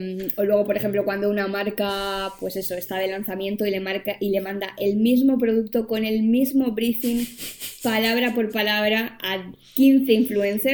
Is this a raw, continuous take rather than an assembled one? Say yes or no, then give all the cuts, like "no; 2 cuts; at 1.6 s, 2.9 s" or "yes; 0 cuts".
yes; 0 cuts